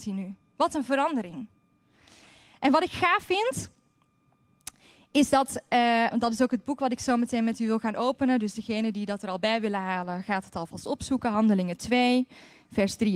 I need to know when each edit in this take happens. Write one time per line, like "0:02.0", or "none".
0:06.1